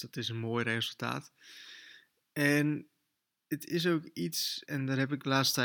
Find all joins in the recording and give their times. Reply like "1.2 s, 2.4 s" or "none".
4.6 s